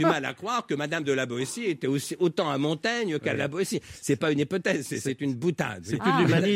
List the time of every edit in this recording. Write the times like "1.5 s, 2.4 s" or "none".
none